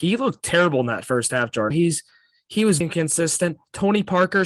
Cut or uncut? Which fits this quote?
cut